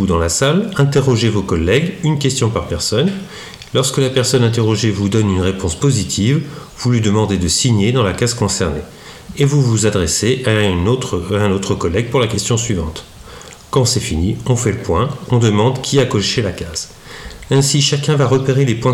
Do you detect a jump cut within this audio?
yes; 2 cuts; at 13.6 s, 15.3 s

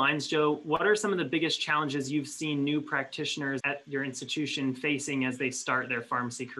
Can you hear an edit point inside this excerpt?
yes; 1 cut; at 3.6 s

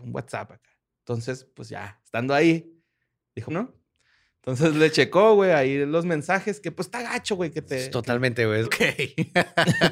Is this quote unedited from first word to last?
no; 2 cuts; at 3.5 s, 8.6 s

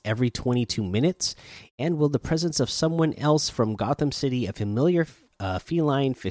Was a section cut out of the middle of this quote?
no; 0 cuts

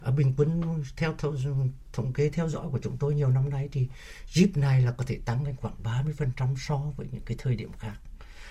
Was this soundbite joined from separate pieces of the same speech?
no; 0 cuts

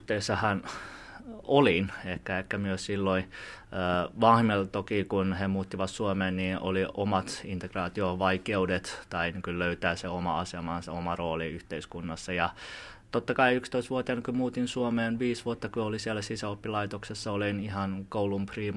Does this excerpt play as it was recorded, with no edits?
yes; 0 cuts

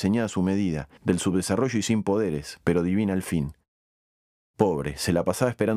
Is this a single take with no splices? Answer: no; 2 cuts; at 1.0 s, 4.4 s

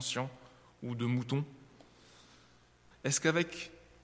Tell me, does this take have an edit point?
yes; 1 cut; at 2.9 s

